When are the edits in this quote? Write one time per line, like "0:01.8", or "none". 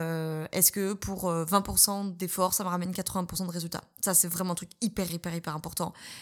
0:05.1